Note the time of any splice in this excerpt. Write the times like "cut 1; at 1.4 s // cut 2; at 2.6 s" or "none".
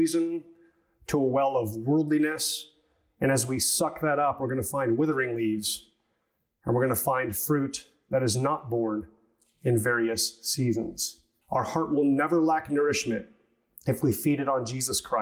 cut 1; at 11.4 s